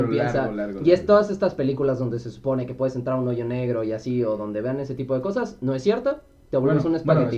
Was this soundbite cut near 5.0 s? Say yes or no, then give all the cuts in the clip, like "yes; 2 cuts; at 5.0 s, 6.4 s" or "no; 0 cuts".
no; 0 cuts